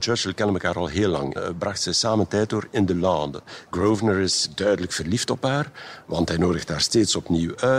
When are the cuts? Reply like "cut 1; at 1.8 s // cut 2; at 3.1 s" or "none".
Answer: cut 1; at 1.4 s // cut 2; at 3.7 s

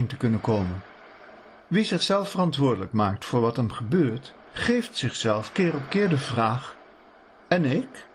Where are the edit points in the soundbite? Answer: none

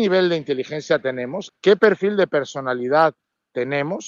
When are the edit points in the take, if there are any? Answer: cut 1; at 1.5 s

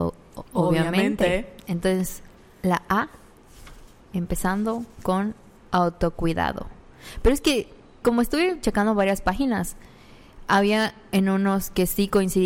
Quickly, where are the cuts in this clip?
cut 1; at 8.0 s

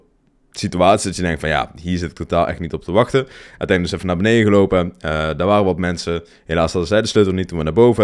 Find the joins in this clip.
none

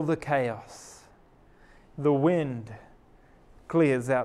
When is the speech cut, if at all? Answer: cut 1; at 1.9 s

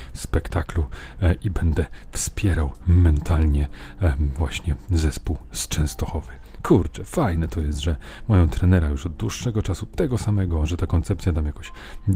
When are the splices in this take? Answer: none

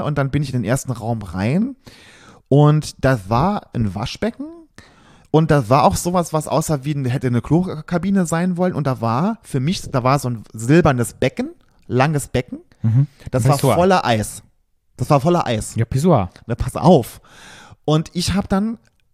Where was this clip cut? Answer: none

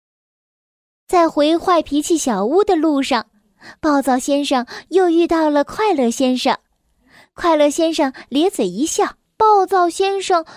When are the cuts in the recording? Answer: cut 1; at 9.3 s

